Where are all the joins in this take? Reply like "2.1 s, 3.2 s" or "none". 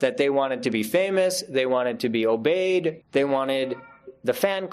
3.0 s